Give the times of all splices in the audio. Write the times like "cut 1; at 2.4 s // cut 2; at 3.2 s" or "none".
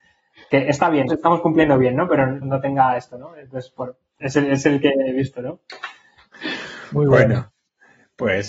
cut 1; at 1.1 s // cut 2; at 2.4 s

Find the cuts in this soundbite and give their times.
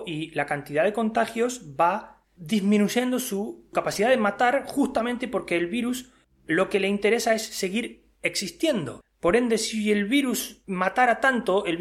none

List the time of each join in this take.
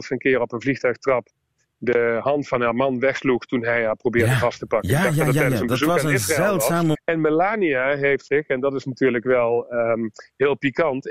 cut 1; at 6.9 s

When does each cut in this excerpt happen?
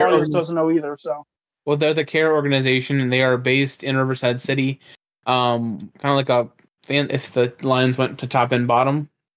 cut 1; at 5.9 s // cut 2; at 7.1 s

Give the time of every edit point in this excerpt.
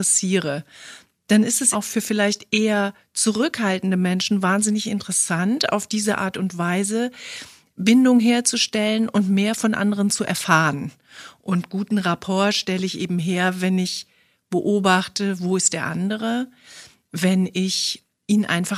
cut 1; at 1.7 s // cut 2; at 11.4 s

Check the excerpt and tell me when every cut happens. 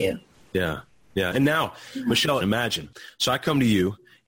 cut 1; at 1.3 s // cut 2; at 2.4 s

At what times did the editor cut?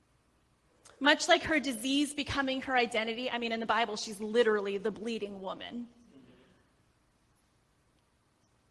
none

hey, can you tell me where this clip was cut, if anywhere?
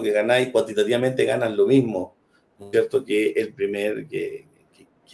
none

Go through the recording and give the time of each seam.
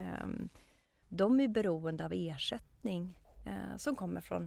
cut 1; at 1.0 s

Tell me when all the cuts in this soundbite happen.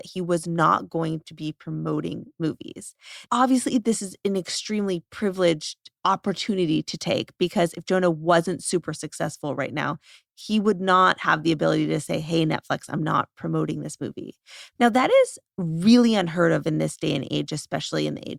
cut 1; at 3.3 s // cut 2; at 14.8 s

